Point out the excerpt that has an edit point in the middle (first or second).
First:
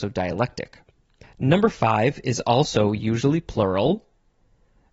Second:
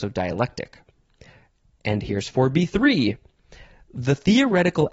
first